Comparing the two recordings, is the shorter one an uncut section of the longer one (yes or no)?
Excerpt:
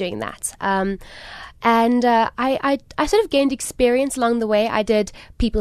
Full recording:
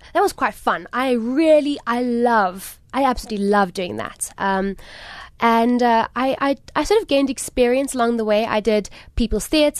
yes